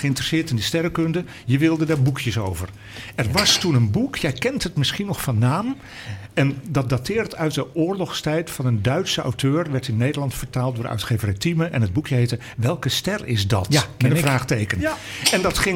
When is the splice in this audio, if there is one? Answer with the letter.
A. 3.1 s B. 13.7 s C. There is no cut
C